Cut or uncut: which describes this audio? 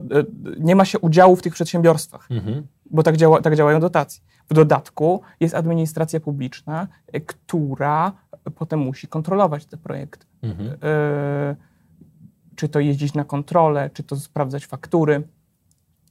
cut